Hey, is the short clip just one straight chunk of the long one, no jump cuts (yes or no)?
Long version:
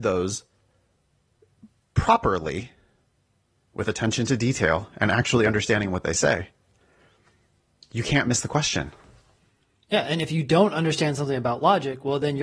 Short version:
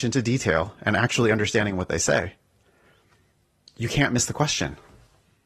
yes